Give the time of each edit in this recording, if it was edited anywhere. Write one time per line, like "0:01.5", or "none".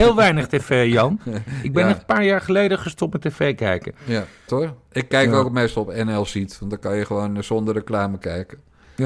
0:04.5